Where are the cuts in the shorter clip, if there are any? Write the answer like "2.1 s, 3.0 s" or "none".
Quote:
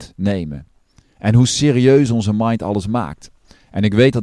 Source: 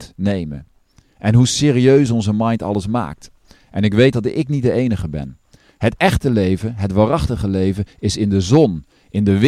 none